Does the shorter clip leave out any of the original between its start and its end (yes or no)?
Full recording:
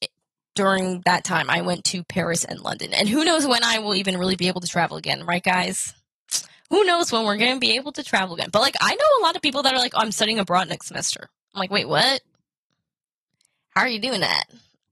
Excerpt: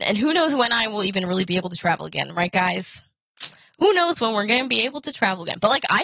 no